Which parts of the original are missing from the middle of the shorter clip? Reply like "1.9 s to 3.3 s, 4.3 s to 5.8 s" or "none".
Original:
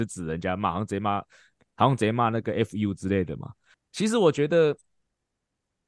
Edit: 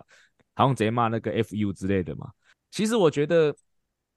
none